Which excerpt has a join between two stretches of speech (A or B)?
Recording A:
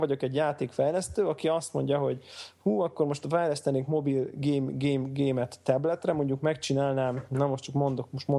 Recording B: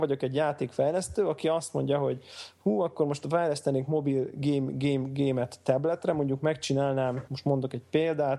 B